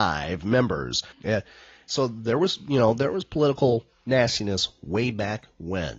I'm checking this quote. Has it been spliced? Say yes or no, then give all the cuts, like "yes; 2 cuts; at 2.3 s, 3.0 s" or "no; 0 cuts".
yes; 1 cut; at 1.1 s